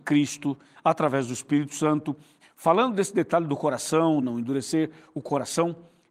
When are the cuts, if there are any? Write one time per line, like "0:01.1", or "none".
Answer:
0:02.4
0:04.2